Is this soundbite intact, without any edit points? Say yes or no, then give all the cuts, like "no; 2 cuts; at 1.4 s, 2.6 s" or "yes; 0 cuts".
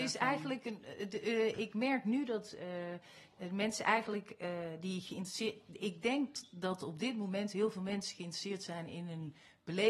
yes; 0 cuts